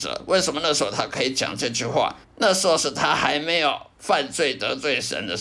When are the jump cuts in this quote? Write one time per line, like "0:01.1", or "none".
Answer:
0:02.2